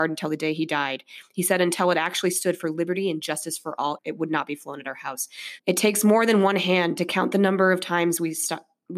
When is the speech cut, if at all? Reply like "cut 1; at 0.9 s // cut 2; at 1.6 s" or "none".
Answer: cut 1; at 4.0 s // cut 2; at 5.6 s